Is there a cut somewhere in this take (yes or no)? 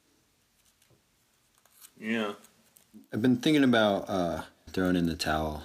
yes